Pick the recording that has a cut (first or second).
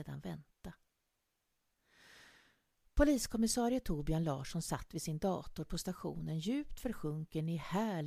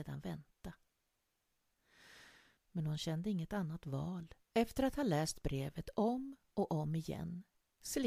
second